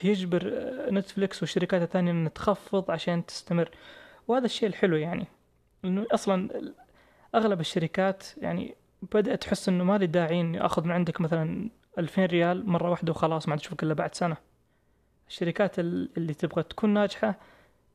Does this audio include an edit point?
no; 0 cuts

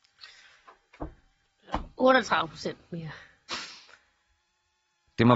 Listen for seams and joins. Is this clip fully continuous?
no; 1 cut; at 3.5 s

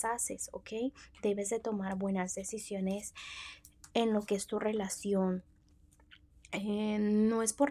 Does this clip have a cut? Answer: no; 0 cuts

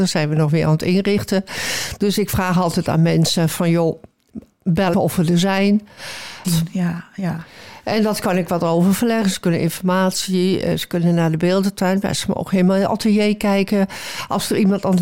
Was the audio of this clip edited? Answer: yes; 2 cuts; at 4.9 s, 6.4 s

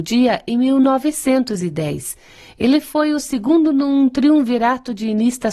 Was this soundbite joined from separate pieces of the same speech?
no; 0 cuts

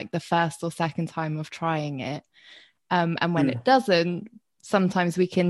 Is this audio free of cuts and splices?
yes; 0 cuts

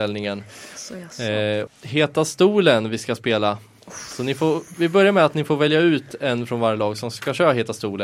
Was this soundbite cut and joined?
yes; 1 cut; at 1.7 s

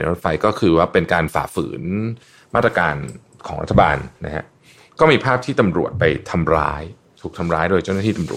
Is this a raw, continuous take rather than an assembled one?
yes; 0 cuts

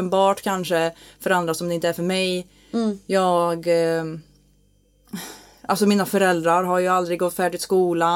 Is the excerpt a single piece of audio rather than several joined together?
yes; 0 cuts

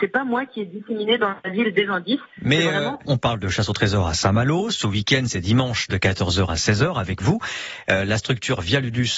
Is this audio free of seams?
no; 1 cut; at 3.1 s

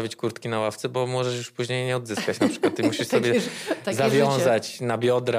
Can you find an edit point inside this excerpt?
no; 0 cuts

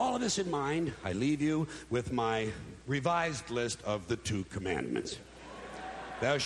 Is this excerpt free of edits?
yes; 0 cuts

